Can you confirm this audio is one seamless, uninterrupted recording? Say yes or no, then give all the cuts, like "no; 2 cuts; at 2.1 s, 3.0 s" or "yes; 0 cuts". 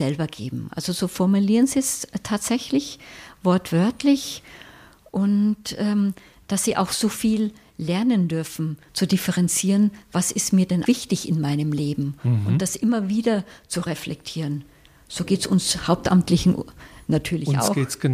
no; 2 cuts; at 8.9 s, 10.9 s